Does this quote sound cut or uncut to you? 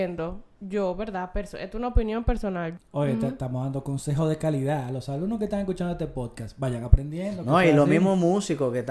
cut